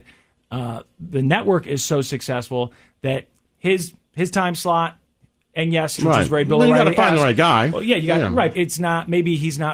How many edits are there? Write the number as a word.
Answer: two